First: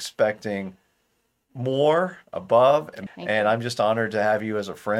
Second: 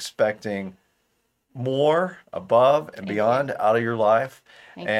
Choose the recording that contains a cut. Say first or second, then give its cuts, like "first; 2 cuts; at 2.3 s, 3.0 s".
first; 1 cut; at 3.1 s